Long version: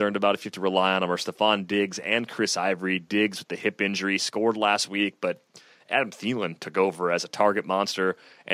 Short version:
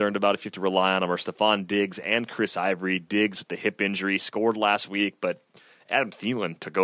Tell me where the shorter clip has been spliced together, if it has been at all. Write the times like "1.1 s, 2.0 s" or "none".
none